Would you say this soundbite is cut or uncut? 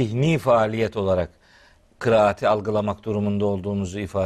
uncut